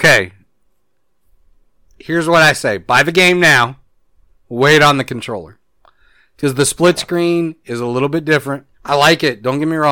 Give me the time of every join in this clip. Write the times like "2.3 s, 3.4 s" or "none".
8.7 s